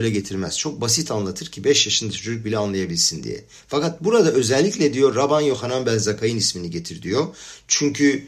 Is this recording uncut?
yes; 0 cuts

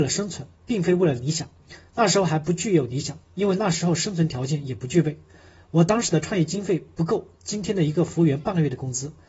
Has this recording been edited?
no; 0 cuts

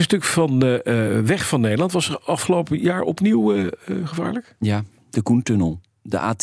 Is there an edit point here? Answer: no; 0 cuts

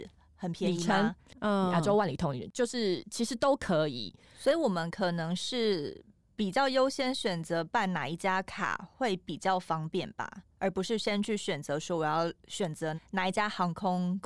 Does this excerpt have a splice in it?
yes; 1 cut; at 1.3 s

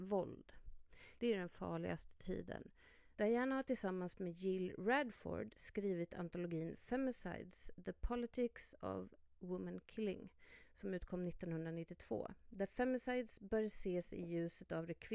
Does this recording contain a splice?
yes; 2 cuts; at 1.2 s, 3.1 s

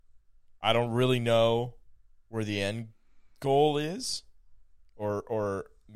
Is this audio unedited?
yes; 0 cuts

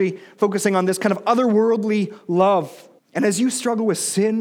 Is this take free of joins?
no; 1 cut; at 3.0 s

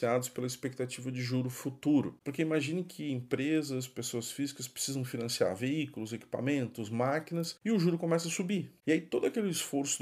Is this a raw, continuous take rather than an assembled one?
no; 2 cuts; at 2.2 s, 8.8 s

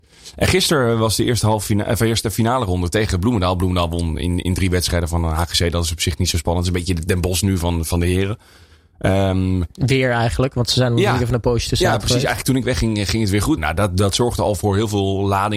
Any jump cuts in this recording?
yes; 1 cut; at 13.6 s

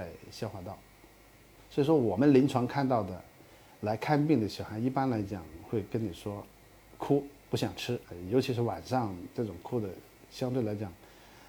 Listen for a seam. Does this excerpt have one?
yes; 2 cuts; at 1.6 s, 8.0 s

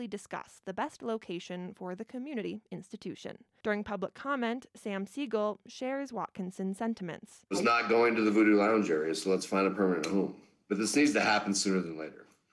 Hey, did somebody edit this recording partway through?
yes; 2 cuts; at 3.6 s, 7.5 s

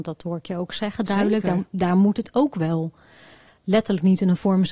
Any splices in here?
no; 0 cuts

